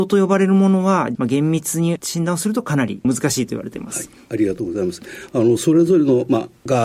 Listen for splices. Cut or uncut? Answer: uncut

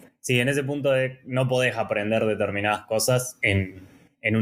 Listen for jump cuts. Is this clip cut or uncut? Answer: uncut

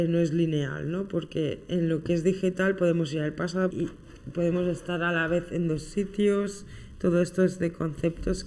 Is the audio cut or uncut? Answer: cut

